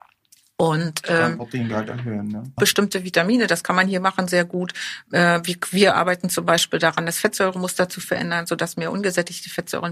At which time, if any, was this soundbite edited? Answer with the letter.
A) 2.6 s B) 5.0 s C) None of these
A